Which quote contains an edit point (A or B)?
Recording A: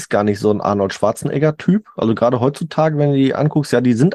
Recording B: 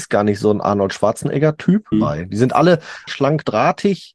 B